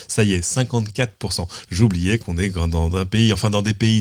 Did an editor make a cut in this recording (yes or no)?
yes